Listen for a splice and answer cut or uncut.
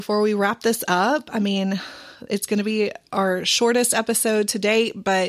uncut